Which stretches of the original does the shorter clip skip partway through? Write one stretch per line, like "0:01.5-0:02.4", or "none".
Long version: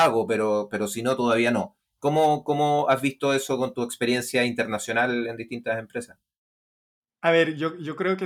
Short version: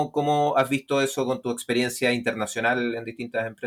none